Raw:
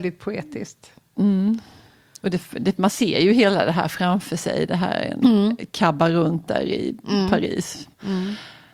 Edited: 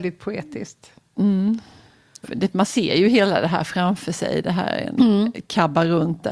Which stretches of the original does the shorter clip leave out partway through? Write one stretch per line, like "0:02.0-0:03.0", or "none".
0:02.2-0:02.5